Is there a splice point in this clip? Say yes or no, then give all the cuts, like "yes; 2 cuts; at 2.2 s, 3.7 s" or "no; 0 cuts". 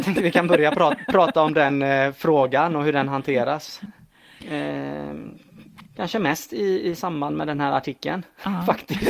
yes; 1 cut; at 4.4 s